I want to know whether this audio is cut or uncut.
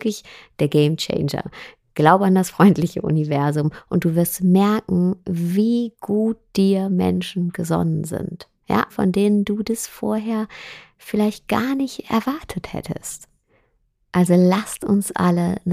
cut